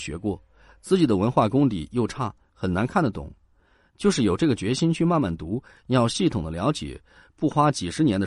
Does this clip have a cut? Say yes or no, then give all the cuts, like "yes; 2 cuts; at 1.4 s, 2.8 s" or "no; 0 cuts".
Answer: no; 0 cuts